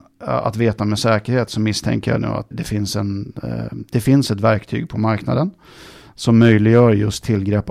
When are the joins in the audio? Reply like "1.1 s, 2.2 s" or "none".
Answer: 2.5 s